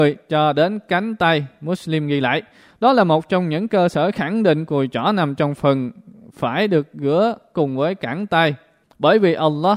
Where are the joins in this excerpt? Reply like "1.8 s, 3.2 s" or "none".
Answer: 8.8 s